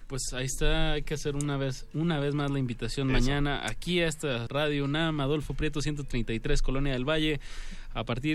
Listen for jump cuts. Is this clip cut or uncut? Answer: cut